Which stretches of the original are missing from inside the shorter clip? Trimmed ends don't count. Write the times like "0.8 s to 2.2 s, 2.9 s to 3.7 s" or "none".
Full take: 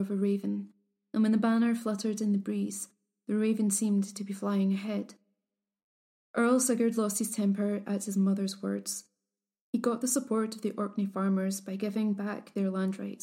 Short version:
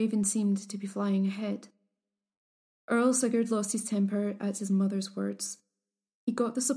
none